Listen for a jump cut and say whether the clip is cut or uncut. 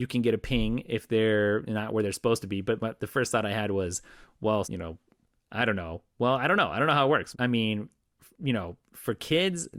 cut